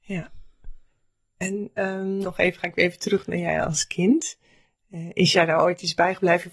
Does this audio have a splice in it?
yes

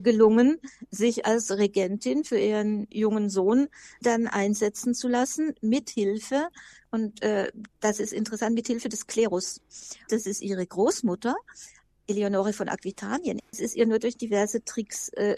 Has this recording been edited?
yes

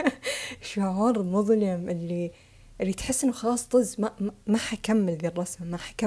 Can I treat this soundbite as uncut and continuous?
yes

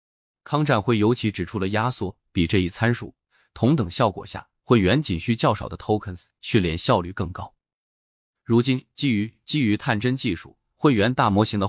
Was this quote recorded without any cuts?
yes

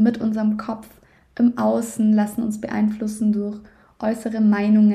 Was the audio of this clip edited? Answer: no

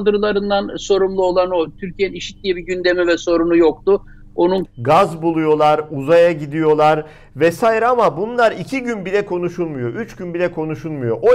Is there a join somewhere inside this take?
yes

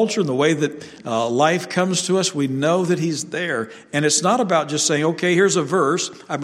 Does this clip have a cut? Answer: no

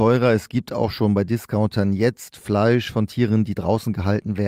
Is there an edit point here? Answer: no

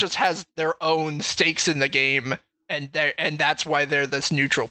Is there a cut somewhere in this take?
no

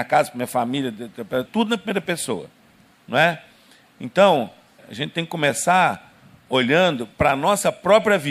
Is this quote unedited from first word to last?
no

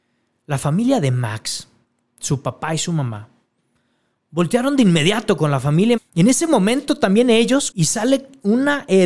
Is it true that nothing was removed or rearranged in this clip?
no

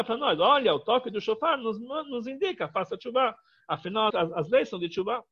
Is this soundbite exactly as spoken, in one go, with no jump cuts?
no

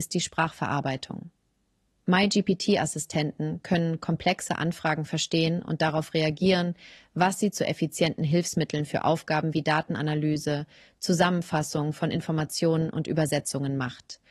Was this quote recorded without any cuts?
yes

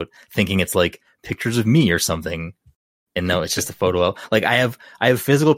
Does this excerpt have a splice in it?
no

